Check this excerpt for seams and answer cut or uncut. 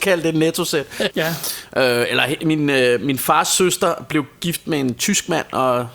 cut